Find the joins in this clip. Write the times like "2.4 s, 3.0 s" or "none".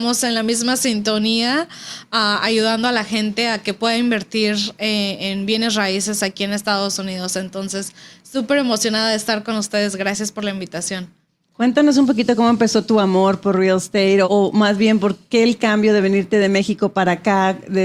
14.2 s

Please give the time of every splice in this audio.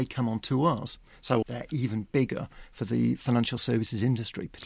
1.4 s

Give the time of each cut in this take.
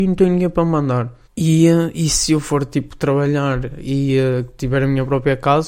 1.2 s

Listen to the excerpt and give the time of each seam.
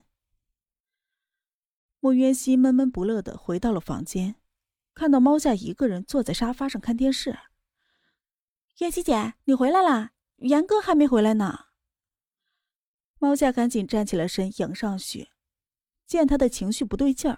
none

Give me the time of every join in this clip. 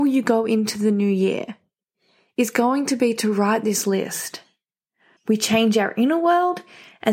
5.2 s

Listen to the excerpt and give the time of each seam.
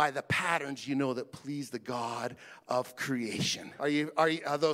3.8 s

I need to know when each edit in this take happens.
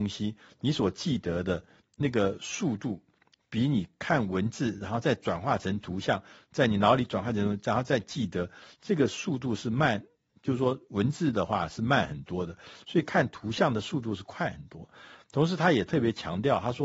none

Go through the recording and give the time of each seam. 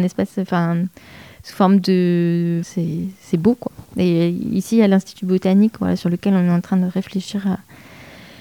2.6 s

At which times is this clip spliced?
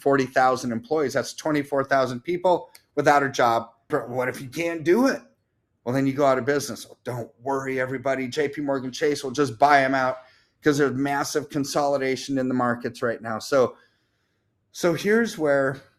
3.9 s

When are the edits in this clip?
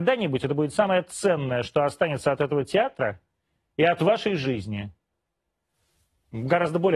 none

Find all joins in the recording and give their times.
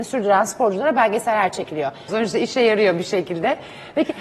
2.1 s

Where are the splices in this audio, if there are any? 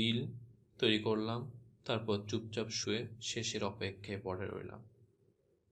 2.8 s

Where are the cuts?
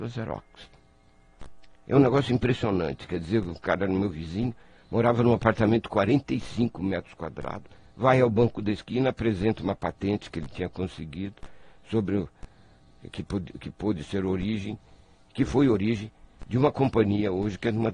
none

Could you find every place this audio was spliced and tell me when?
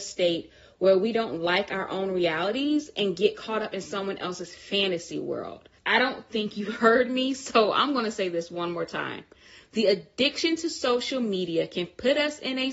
5.8 s

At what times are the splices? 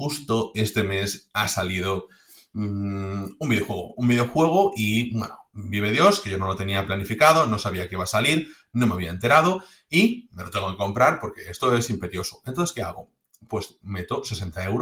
none

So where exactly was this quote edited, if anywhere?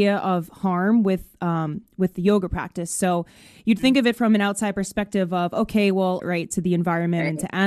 6.2 s

